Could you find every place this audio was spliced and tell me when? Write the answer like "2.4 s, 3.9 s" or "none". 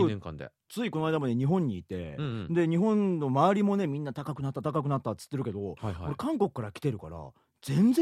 none